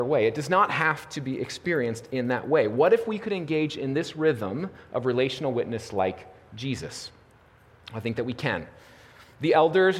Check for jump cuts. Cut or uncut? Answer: uncut